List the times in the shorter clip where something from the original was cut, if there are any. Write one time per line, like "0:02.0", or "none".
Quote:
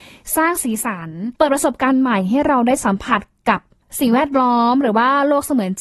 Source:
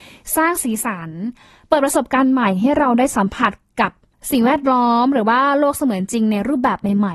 0:01.4